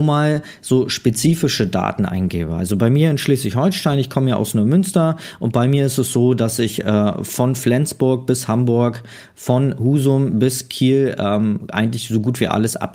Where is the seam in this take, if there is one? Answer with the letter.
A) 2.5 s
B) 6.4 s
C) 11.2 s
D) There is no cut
D